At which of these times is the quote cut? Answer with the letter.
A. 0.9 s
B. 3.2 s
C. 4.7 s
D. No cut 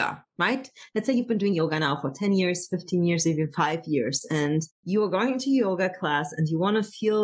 C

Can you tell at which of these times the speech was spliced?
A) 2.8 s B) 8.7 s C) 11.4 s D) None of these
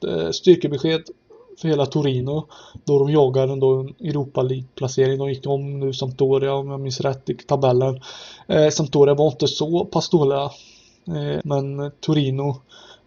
C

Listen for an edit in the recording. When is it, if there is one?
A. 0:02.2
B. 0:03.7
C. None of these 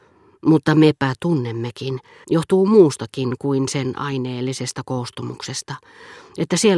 A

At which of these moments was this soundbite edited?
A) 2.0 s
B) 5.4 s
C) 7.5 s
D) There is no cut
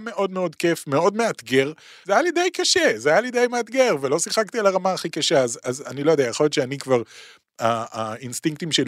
A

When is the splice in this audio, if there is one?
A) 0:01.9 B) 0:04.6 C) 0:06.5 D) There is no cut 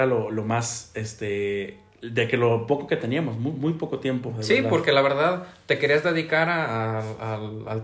D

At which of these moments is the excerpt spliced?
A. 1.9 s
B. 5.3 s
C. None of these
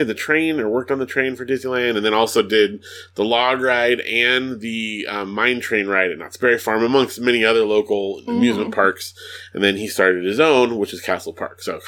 C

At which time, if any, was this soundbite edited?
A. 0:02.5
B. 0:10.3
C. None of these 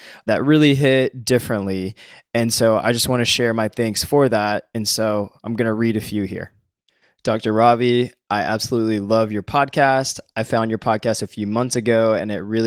C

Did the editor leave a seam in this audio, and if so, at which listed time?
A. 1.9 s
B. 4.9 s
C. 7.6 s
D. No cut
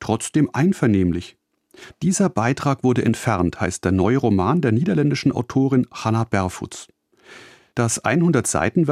A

